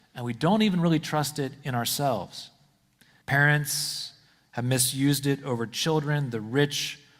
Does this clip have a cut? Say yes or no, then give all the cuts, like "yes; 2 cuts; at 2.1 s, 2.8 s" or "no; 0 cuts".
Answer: yes; 1 cut; at 3.2 s